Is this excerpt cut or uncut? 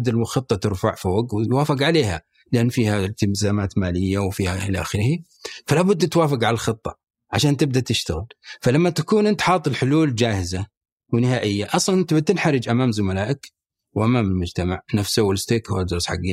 uncut